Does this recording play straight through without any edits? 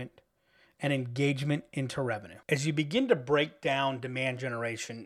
no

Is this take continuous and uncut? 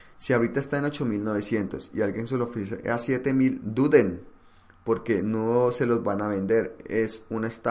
yes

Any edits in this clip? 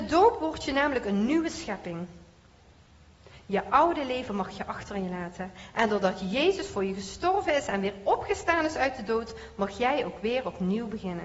no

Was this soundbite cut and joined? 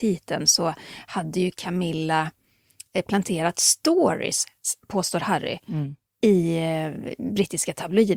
no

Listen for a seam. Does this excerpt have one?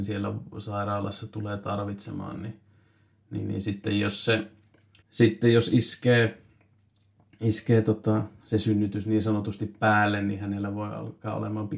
yes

